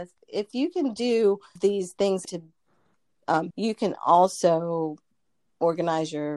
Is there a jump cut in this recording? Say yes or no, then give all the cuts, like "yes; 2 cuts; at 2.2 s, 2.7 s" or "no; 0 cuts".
yes; 1 cut; at 3.5 s